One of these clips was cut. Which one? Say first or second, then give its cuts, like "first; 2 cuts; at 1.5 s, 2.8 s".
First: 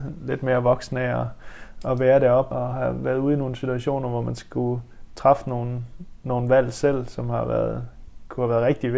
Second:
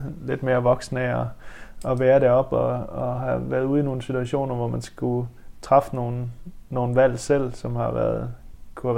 first; 1 cut; at 2.5 s